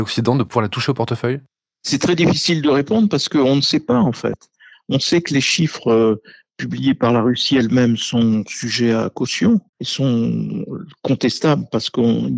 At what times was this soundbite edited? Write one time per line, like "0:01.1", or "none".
0:09.7